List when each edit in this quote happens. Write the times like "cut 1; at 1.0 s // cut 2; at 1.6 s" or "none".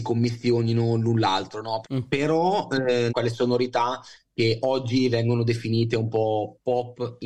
cut 1; at 1.8 s // cut 2; at 3.1 s